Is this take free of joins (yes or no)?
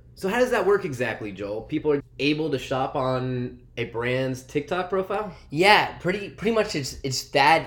no